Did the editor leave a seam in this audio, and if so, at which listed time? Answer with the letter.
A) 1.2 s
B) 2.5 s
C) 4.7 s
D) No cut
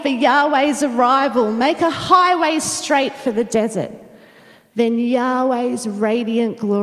C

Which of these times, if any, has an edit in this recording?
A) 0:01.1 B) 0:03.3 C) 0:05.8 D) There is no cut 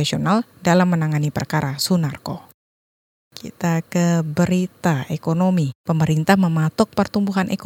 D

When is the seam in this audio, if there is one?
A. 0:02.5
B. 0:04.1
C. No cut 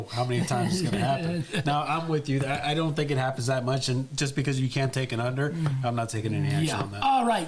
C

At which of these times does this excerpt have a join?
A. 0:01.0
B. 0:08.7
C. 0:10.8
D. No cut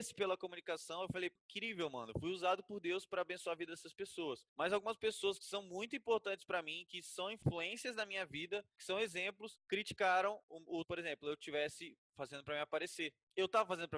C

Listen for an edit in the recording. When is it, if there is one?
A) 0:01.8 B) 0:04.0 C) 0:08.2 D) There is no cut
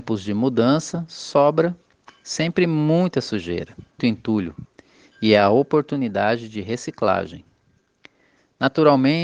B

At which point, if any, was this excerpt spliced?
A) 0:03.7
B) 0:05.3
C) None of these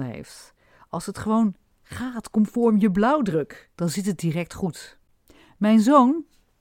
A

